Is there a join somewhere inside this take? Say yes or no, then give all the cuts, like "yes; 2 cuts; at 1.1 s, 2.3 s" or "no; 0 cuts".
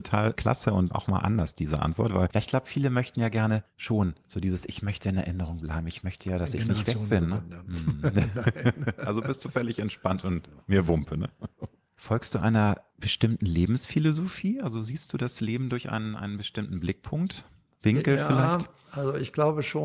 yes; 1 cut; at 0.9 s